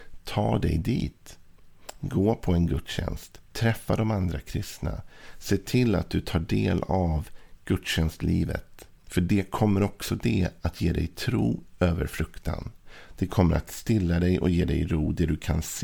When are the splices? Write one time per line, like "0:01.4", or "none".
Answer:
0:09.0